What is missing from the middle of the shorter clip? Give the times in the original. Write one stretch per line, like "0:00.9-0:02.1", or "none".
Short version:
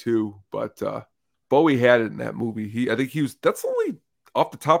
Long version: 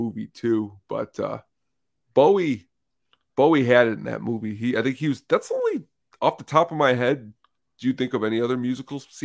0:01.7-0:03.2